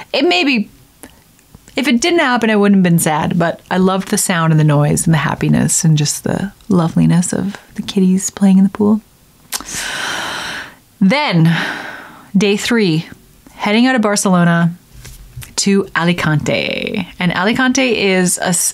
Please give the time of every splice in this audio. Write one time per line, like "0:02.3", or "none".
none

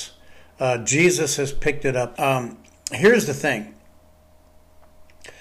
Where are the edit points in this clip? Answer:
0:02.1

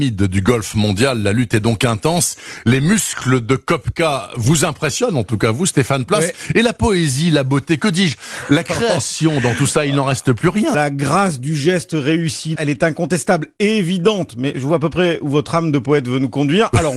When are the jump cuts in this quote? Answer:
0:10.7
0:12.6

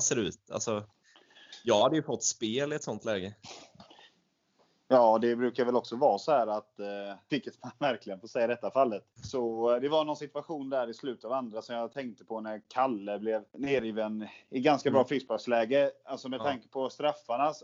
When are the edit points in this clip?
0:07.3
0:09.1
0:13.5

